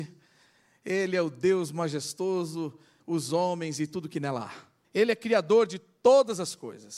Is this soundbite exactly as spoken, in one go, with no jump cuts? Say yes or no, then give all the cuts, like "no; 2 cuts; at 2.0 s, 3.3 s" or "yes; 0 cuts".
no; 2 cuts; at 3.0 s, 4.8 s